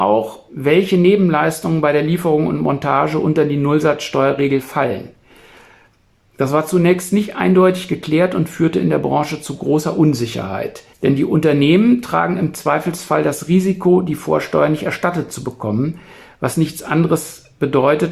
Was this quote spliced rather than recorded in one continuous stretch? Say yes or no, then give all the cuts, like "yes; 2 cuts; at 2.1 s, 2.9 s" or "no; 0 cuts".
yes; 1 cut; at 10.9 s